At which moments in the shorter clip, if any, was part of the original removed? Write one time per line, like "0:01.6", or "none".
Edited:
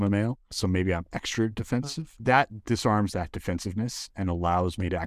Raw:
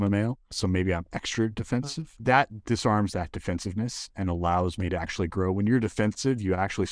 none

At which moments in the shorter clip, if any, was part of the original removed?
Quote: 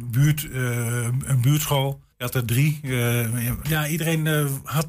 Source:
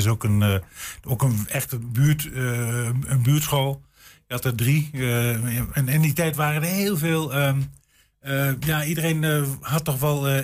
0:02.1
0:03.6

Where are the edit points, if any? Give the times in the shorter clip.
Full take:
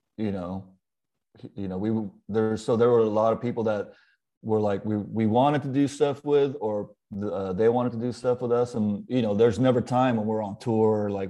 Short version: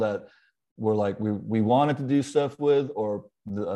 none

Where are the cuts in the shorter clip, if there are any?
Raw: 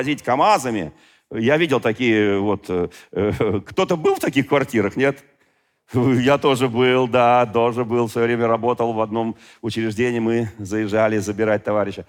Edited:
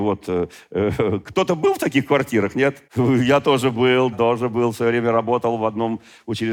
0:02.9
0:04.1

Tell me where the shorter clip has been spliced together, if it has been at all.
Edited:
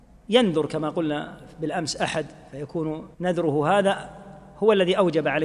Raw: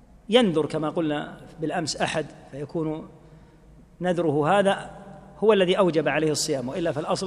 0:03.1

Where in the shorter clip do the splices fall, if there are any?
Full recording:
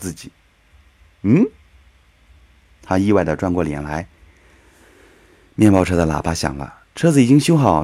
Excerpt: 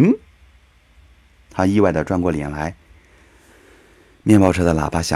none

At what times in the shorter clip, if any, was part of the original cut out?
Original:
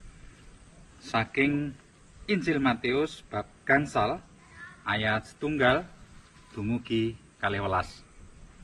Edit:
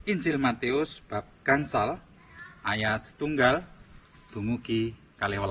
none

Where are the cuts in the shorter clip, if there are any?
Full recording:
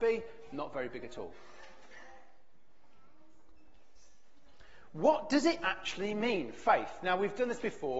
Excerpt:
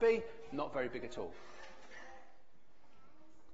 none

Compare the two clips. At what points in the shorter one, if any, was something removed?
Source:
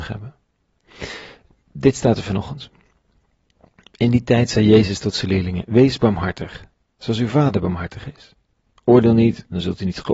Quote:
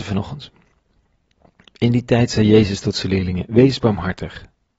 none

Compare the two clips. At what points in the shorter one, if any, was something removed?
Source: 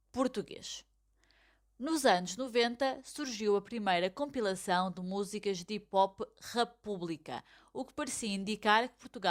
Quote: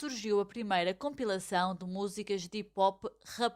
none

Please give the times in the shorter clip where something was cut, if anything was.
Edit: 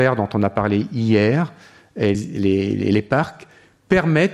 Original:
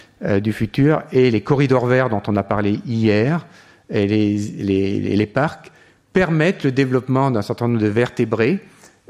0:02.1

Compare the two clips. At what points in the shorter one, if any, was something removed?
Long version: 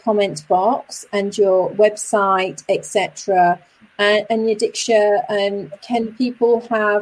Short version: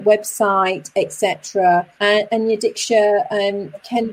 0:01.9

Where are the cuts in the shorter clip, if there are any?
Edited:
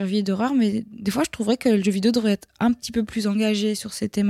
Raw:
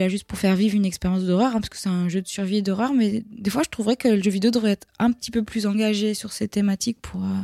none

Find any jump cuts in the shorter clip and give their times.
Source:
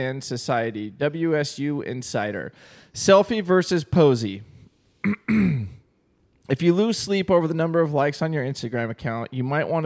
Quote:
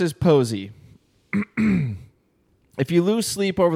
none

